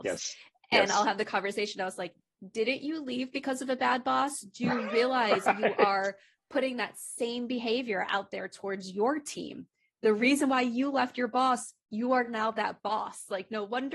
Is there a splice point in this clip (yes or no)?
no